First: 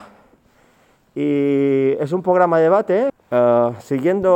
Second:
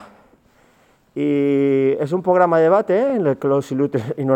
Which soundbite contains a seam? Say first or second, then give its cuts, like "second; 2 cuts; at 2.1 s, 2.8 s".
first; 1 cut; at 3.1 s